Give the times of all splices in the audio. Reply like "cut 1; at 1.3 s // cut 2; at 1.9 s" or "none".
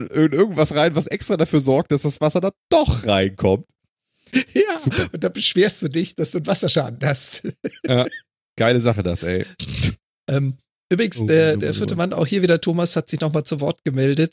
none